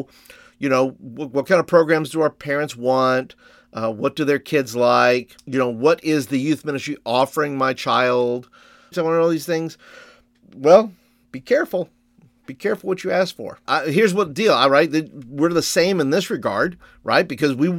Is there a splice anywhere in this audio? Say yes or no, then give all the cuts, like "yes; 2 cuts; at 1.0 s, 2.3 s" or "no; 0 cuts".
yes; 2 cuts; at 8.9 s, 13.7 s